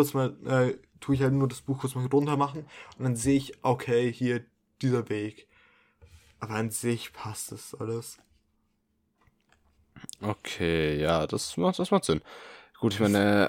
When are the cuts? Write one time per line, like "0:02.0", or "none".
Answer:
none